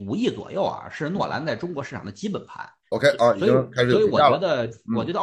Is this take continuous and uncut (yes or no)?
no